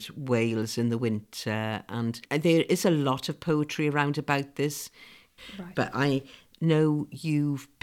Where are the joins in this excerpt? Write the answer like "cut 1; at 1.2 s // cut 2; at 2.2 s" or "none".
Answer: none